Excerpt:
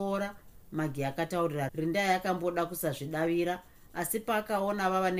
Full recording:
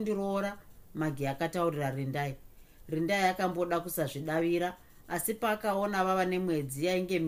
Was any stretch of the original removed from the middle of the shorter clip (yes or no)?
yes